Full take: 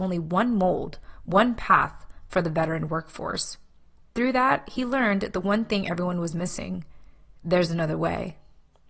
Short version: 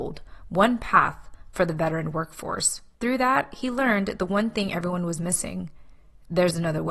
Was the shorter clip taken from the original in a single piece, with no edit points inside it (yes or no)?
no